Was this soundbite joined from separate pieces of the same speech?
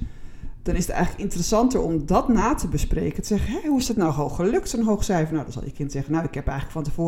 no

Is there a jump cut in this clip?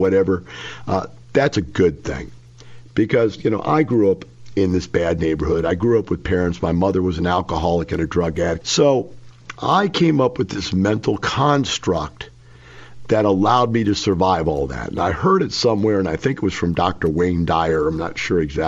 yes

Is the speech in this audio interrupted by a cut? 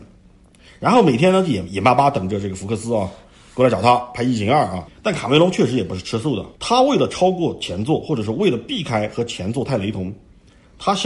yes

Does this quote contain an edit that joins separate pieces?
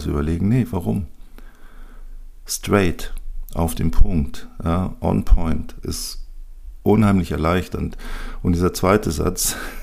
no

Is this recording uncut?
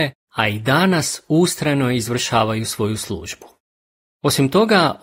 yes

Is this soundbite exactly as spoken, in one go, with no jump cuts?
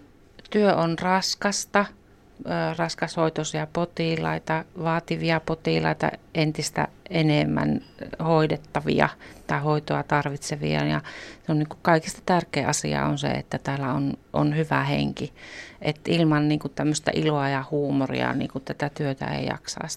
yes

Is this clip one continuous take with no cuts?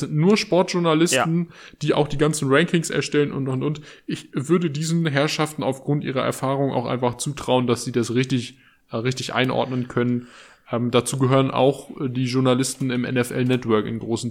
yes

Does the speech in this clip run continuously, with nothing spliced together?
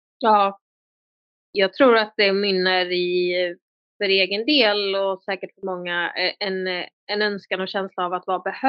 yes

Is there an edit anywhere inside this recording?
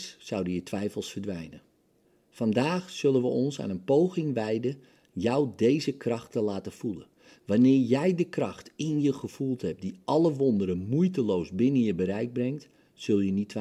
no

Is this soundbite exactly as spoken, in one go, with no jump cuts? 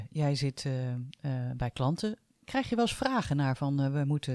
yes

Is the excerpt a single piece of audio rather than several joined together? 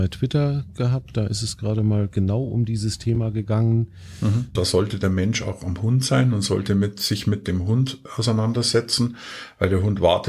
no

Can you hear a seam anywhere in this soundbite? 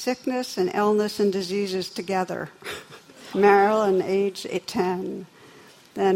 no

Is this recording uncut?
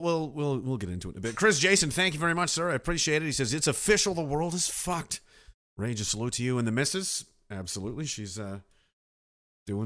yes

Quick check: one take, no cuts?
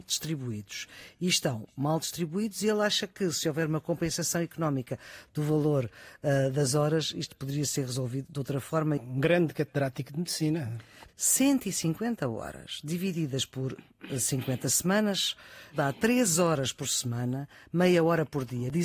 no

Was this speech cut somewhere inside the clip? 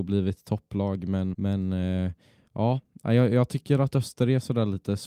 yes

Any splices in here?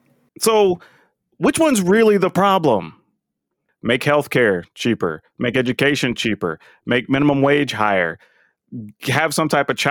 yes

